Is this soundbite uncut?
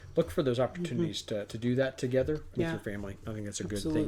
no; 2 cuts; at 1.5 s, 2.5 s

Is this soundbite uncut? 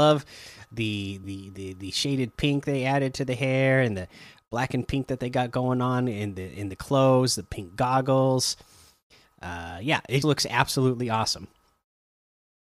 no; 2 cuts; at 1.2 s, 10.2 s

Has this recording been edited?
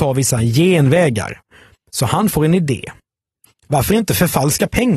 no; 0 cuts

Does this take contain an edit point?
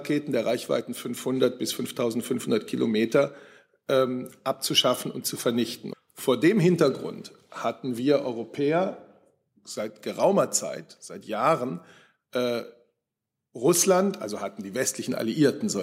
yes; 1 cut; at 5.9 s

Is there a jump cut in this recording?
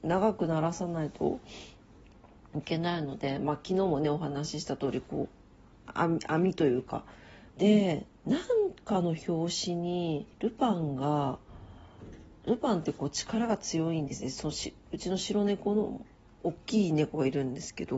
yes; 2 cuts; at 7.5 s, 10.3 s

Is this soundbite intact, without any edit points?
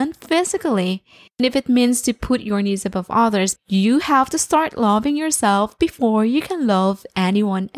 no; 2 cuts; at 1.4 s, 3.6 s

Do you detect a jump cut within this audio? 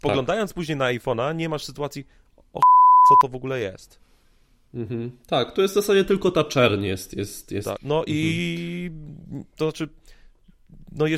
yes; 1 cut; at 7.8 s

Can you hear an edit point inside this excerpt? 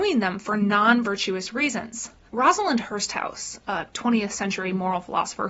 yes; 1 cut; at 2.3 s

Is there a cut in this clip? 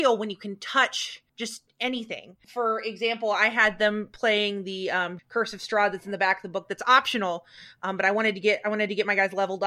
yes; 2 cuts; at 1.3 s, 5.2 s

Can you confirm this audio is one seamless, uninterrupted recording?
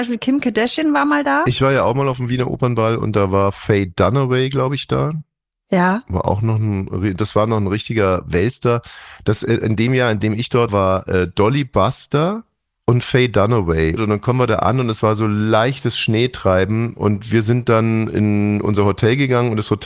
no; 2 cuts; at 10.7 s, 14.0 s

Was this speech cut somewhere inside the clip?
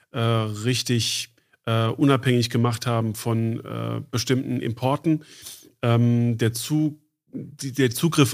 no; 0 cuts

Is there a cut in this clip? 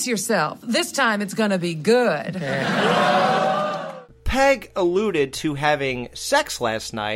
no; 0 cuts

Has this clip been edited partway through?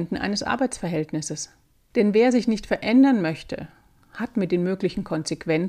no; 0 cuts

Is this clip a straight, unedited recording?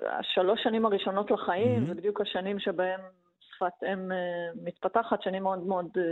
yes; 0 cuts

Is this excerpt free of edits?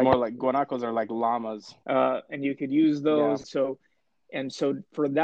no; 2 cuts; at 1.8 s, 3.4 s

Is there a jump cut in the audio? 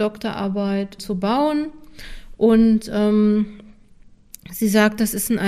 yes; 1 cut; at 1.0 s

